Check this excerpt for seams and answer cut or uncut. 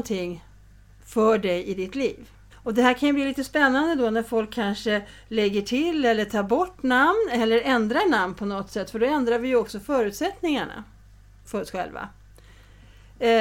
cut